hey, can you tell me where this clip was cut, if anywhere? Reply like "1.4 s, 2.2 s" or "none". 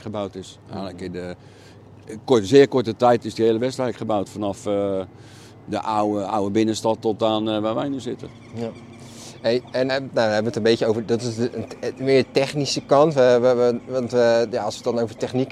9.9 s